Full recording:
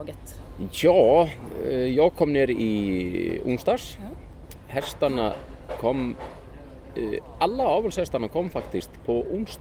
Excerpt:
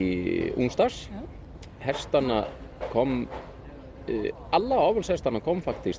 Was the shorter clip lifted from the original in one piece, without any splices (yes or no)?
yes